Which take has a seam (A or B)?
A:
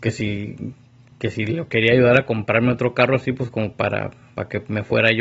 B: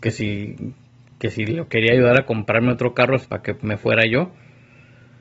B